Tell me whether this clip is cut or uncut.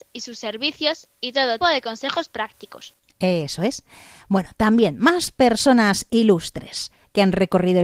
cut